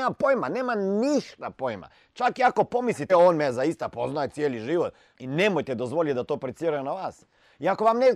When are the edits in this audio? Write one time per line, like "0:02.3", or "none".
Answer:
0:03.1
0:05.1